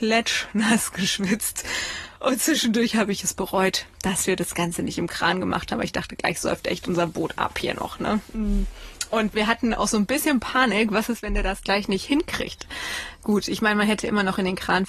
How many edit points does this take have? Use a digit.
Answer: 0